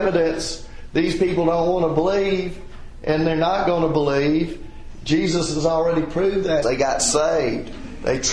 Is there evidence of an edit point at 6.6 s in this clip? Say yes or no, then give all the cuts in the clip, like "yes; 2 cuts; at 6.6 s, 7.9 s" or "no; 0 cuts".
yes; 1 cut; at 6.6 s